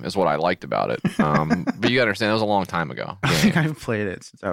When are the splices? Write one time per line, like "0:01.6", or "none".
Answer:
0:03.2